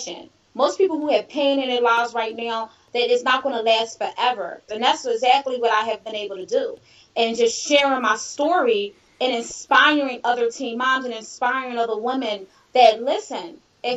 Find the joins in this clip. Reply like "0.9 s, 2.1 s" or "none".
4.7 s

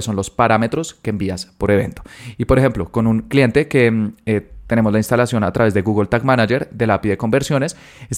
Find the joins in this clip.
none

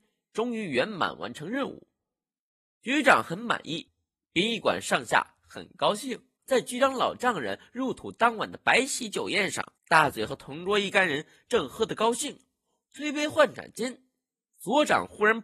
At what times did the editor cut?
6.3 s, 9.7 s

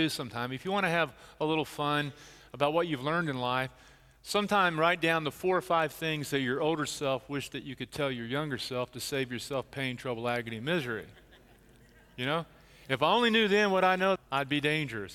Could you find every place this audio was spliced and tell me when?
14.2 s

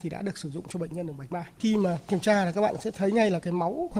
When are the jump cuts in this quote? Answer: 1.6 s

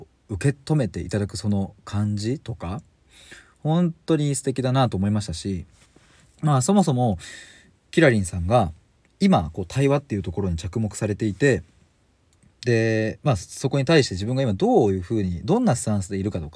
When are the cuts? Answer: none

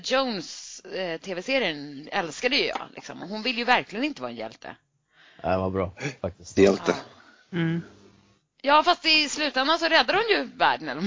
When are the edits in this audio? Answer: 6.6 s

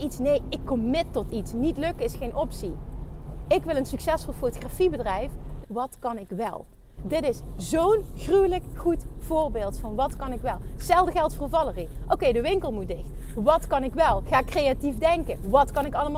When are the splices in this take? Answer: 5.6 s, 7.0 s, 13.3 s

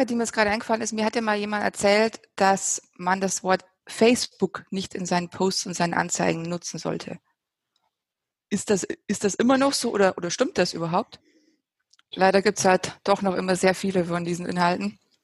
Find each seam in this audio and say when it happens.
12.1 s

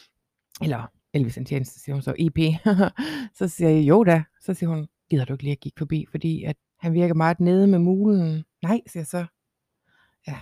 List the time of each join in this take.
6.6 s, 8.5 s

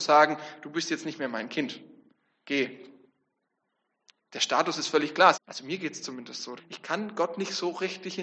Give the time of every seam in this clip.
5.3 s, 6.6 s

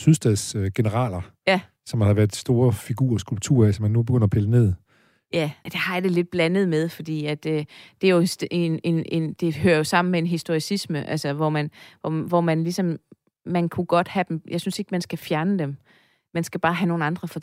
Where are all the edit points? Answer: 5.7 s

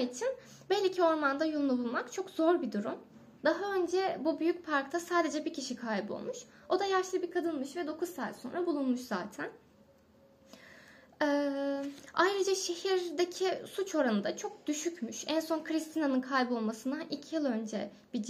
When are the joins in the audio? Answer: 3.4 s

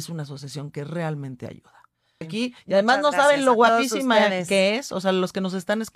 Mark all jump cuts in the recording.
2.2 s

